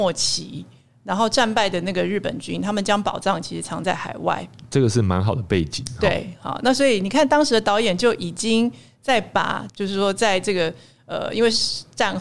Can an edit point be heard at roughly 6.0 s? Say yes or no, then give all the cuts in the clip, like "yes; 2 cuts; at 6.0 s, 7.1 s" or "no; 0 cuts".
no; 1 cut; at 9.7 s